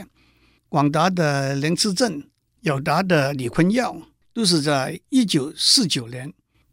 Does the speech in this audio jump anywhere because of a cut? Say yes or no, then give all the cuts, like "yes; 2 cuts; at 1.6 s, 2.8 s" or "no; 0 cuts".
yes; 2 cuts; at 2.5 s, 4.2 s